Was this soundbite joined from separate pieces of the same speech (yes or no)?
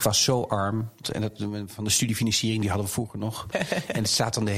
yes